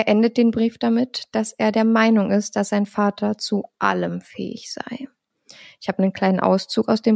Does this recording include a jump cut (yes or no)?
no